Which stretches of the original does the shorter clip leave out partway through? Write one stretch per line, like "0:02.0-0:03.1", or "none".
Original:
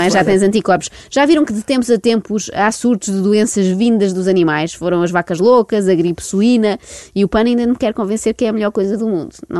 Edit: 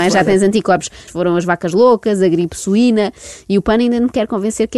0:01.1-0:04.7